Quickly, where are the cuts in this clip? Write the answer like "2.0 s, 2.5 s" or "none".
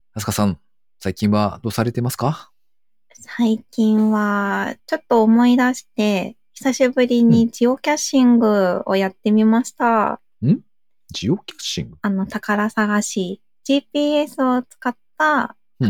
none